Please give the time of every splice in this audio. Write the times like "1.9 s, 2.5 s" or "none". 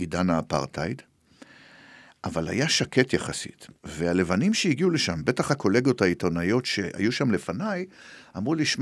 3.8 s